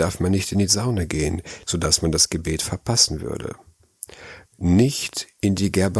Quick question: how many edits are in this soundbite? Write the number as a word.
two